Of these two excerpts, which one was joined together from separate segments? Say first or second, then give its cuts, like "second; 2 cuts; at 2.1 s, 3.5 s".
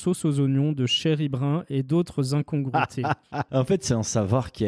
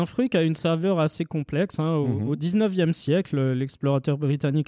first; 1 cut; at 3.5 s